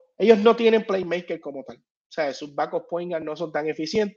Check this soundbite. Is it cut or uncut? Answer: uncut